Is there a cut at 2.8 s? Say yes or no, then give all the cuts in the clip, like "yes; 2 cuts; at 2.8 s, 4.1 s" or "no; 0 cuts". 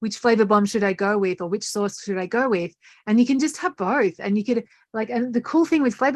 no; 0 cuts